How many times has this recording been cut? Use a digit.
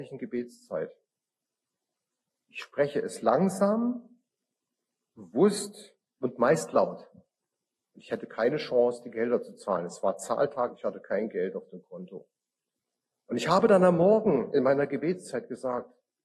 1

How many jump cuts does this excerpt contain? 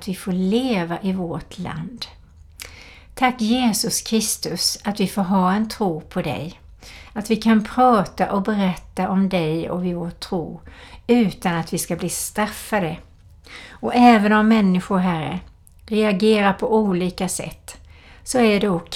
0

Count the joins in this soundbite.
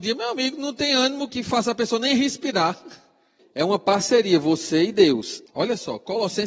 3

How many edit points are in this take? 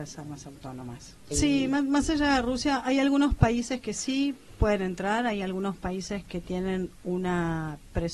1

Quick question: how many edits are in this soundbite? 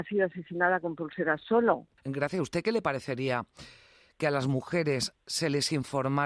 1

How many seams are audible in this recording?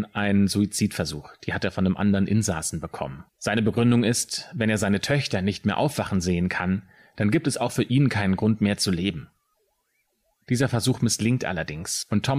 1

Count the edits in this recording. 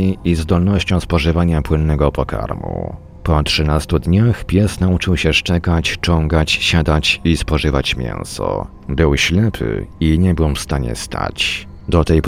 0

